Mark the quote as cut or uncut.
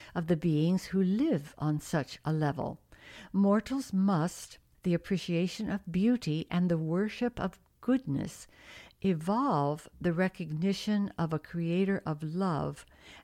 cut